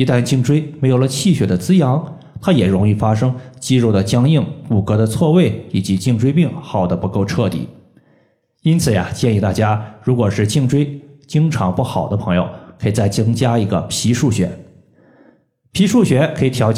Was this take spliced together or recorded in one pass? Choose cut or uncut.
uncut